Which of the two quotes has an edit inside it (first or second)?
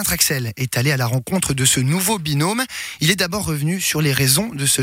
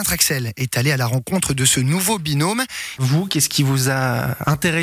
second